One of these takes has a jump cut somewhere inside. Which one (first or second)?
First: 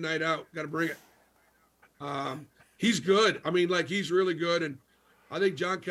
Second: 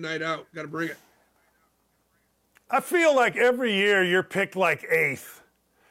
first